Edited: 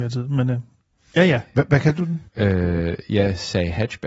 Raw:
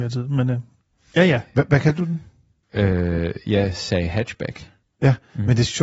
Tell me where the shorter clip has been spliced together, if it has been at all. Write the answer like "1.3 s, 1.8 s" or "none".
2.3 s